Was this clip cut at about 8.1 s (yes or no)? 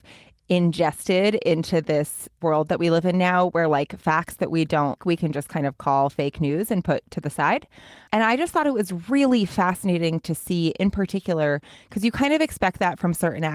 yes